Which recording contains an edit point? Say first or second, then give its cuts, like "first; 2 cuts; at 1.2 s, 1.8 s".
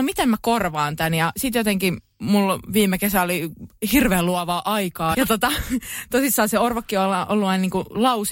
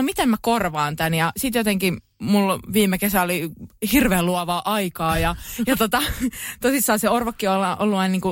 first; 1 cut; at 5.1 s